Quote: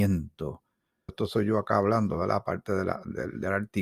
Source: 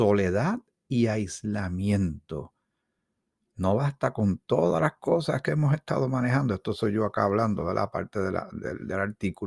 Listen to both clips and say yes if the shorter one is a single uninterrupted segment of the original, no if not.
no